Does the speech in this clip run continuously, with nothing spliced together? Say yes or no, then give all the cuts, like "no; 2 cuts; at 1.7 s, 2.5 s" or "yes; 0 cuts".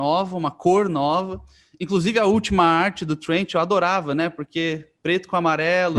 yes; 0 cuts